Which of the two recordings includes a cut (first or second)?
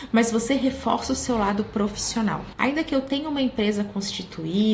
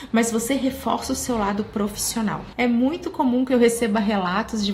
first